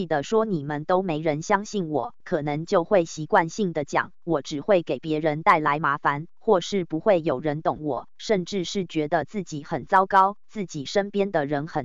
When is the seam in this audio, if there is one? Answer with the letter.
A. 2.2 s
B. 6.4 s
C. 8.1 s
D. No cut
A